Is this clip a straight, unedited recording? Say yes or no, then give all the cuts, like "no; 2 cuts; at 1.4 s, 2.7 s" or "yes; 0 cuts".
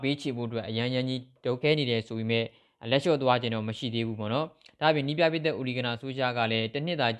no; 1 cut; at 1.6 s